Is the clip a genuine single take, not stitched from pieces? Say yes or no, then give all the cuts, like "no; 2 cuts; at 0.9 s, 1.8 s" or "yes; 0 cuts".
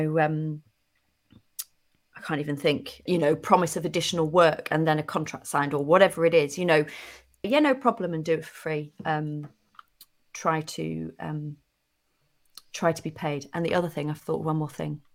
no; 2 cuts; at 3.1 s, 7.4 s